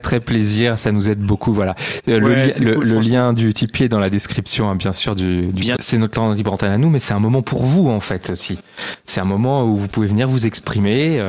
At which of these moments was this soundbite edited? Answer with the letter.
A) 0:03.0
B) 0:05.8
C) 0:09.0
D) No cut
B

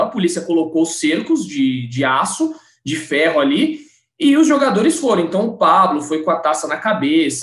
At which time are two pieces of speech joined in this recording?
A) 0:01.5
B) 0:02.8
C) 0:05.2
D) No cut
D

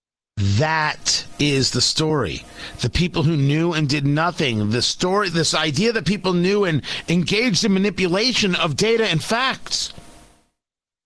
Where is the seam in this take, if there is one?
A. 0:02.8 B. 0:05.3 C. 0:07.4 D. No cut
B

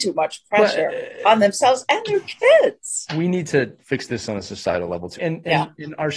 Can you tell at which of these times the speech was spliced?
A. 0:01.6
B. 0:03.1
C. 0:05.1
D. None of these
C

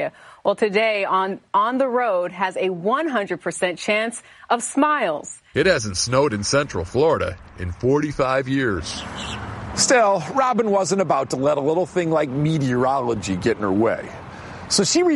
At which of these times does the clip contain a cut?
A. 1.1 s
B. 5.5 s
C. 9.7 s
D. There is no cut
B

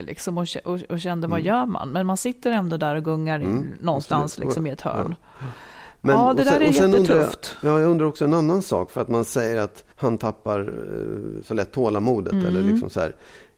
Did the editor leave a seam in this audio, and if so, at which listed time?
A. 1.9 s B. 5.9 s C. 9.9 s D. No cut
C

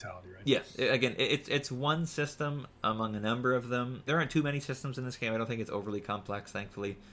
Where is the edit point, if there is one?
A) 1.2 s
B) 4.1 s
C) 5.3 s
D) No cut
B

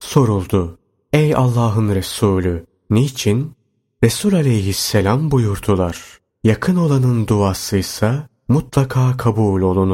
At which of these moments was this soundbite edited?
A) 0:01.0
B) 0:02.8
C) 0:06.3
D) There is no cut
C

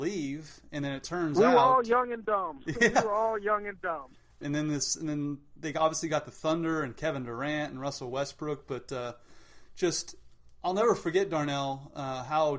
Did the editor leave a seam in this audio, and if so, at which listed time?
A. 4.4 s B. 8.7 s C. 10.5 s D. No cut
A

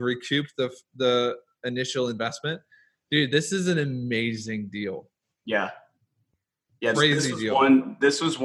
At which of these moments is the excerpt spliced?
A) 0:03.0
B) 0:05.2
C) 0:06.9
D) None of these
C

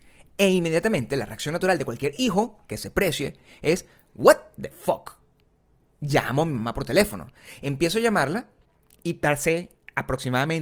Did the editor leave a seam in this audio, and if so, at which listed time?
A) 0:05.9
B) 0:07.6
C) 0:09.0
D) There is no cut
D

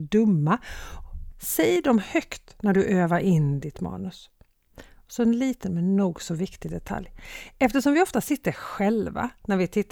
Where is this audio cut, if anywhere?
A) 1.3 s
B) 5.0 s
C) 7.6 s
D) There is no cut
A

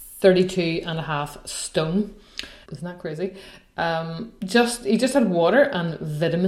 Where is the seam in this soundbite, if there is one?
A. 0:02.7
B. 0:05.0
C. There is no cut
A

